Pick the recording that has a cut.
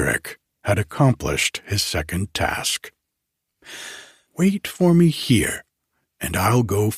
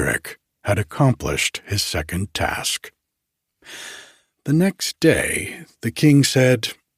first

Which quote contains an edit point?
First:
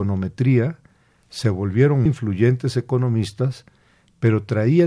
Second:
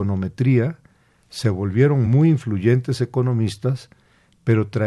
first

